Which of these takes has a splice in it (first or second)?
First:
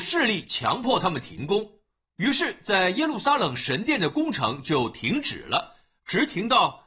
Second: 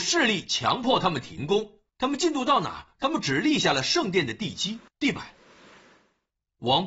second